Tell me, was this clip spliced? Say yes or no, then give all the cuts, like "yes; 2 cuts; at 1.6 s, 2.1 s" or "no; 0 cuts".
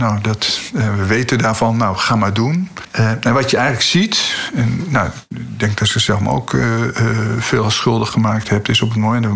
no; 0 cuts